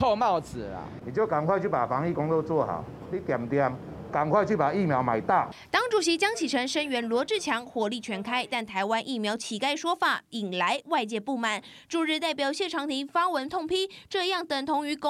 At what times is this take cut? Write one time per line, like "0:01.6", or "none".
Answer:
0:01.0